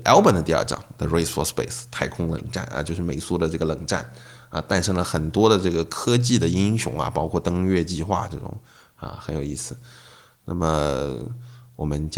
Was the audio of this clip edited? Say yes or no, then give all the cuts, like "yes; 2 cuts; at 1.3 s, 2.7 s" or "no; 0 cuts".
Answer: no; 0 cuts